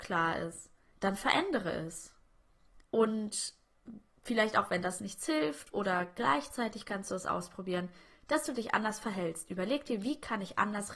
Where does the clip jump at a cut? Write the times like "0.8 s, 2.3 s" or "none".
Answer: 2.8 s